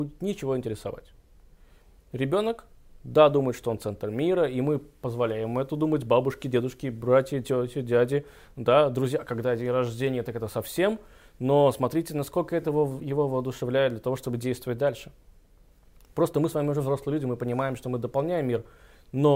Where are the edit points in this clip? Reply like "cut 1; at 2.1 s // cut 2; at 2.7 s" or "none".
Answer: none